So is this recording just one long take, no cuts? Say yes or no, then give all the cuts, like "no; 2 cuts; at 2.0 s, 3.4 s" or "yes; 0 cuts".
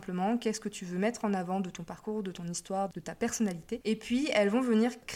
no; 1 cut; at 3.8 s